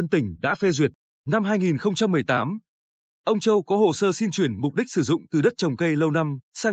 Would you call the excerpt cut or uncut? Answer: cut